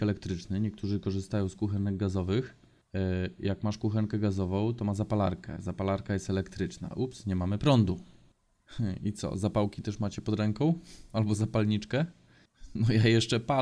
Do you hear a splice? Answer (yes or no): no